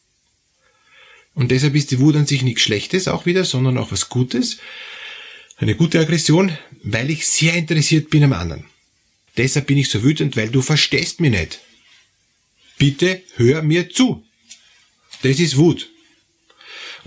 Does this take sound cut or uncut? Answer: cut